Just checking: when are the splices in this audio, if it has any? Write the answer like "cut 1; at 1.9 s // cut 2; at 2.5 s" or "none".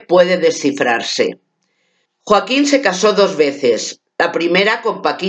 cut 1; at 2.1 s